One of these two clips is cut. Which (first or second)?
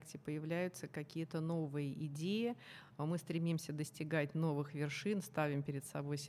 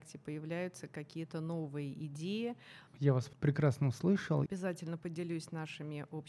second